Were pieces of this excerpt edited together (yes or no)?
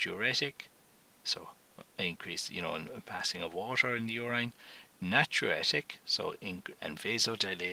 yes